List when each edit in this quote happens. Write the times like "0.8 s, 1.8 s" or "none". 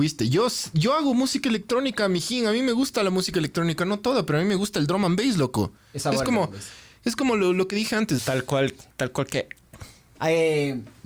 8.2 s